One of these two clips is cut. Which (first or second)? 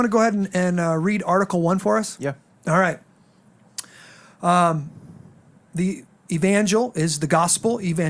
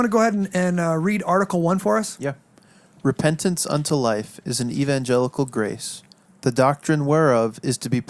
first